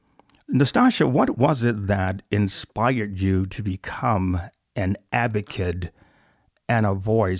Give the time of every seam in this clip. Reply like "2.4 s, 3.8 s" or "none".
none